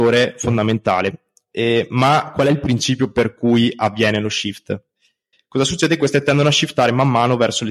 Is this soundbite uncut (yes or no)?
no